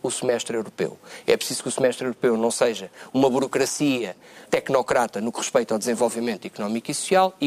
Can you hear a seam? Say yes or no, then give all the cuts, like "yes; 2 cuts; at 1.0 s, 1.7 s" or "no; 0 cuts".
yes; 1 cut; at 4.5 s